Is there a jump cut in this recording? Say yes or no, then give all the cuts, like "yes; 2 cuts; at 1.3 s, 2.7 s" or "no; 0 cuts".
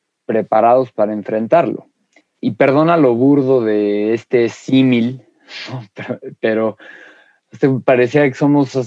no; 0 cuts